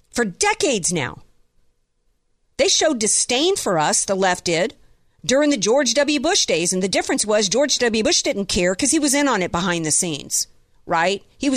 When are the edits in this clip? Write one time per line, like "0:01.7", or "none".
none